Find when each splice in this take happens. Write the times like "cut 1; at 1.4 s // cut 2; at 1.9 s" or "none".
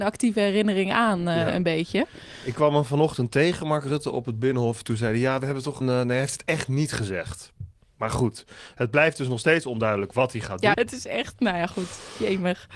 cut 1; at 5.8 s // cut 2; at 10.7 s